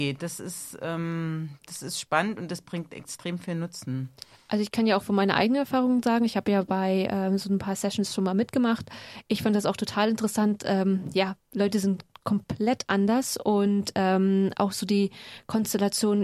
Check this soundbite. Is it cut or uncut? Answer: uncut